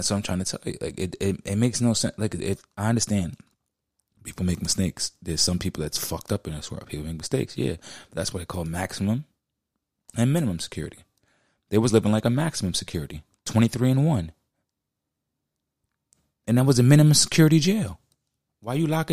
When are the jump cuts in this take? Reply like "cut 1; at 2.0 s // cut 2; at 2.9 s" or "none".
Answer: none

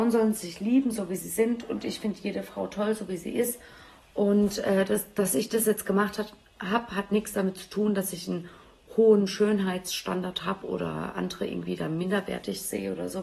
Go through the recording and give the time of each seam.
none

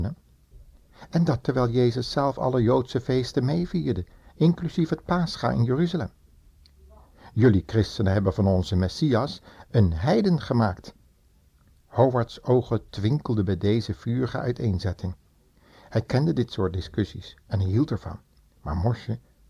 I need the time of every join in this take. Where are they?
none

